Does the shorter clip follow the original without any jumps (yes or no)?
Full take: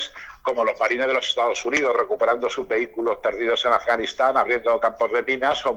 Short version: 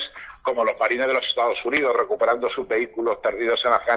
yes